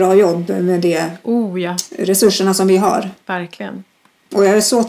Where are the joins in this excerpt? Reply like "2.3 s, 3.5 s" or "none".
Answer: 3.2 s